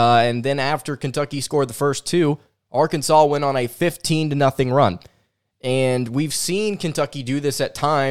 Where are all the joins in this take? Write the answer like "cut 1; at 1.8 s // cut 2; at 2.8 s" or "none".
none